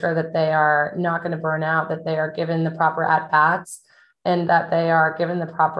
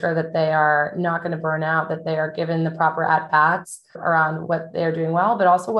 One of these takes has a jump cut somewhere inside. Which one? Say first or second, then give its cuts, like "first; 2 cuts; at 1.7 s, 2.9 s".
second; 1 cut; at 3.9 s